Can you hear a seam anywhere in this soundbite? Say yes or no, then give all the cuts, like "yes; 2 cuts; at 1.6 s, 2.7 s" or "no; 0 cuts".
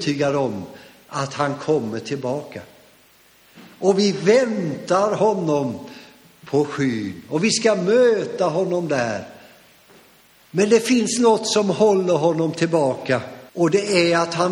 yes; 1 cut; at 13.5 s